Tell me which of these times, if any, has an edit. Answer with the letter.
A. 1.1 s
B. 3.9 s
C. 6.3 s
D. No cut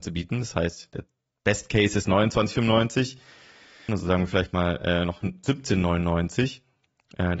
B